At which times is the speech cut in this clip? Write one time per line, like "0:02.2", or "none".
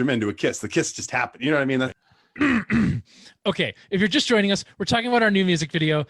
0:01.9

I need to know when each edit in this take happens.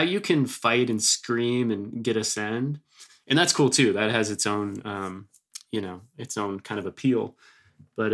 none

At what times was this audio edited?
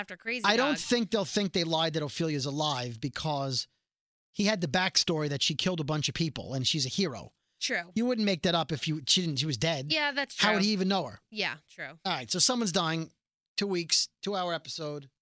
none

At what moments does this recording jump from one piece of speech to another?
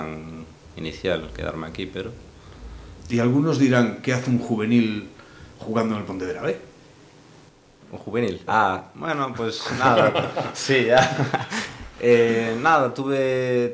0:08.5

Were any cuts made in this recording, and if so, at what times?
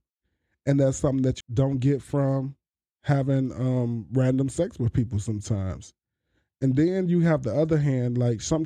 0:01.4

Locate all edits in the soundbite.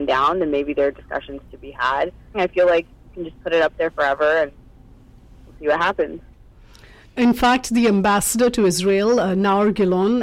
0:02.3

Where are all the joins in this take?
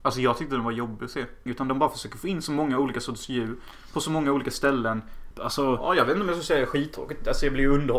0:01.5
0:05.3

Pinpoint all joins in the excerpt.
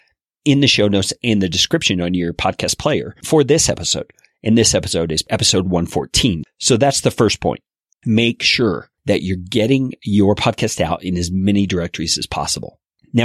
0:06.4
0:07.9

